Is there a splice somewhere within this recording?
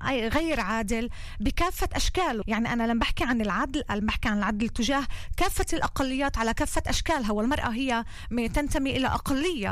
yes; 1 cut; at 2.4 s

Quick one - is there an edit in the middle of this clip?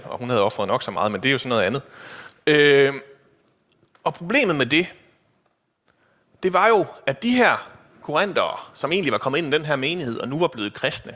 no; 0 cuts

